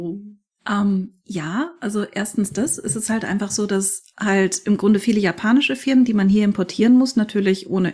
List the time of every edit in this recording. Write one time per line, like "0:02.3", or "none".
none